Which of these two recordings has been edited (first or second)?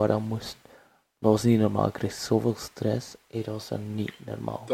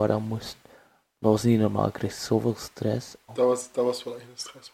second